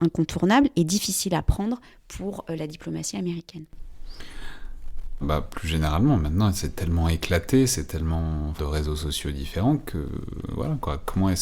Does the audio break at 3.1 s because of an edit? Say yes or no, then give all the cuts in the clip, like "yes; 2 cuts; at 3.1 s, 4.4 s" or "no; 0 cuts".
no; 2 cuts; at 5.2 s, 8.6 s